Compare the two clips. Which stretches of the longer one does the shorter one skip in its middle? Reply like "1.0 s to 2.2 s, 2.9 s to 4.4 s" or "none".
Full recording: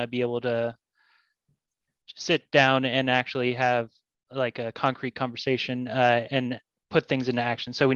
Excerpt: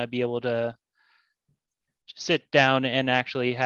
none